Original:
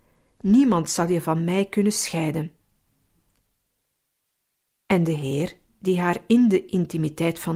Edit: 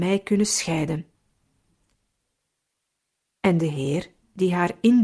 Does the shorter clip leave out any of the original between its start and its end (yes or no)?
no